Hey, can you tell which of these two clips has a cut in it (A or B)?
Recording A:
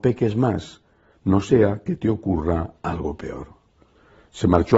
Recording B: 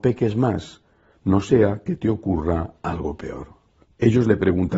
B